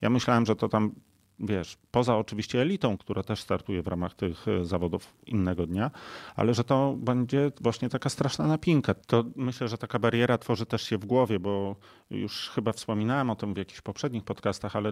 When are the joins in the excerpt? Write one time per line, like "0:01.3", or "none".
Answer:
0:03.0
0:09.0